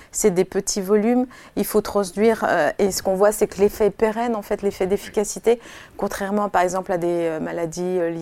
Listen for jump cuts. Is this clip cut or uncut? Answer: uncut